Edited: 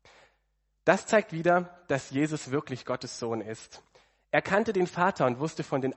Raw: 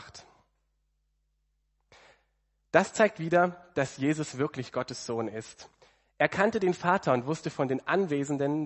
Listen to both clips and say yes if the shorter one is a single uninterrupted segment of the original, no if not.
yes